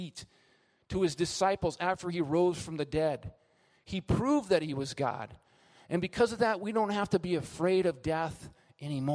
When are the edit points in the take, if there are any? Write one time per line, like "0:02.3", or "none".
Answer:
none